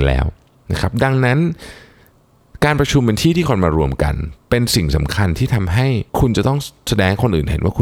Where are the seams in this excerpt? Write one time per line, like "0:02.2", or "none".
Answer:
0:06.1